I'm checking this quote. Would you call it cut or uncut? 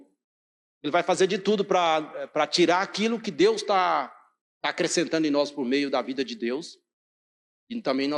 uncut